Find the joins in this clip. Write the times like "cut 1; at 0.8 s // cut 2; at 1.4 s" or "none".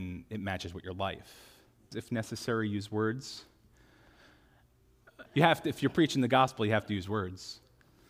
cut 1; at 1.9 s // cut 2; at 5.3 s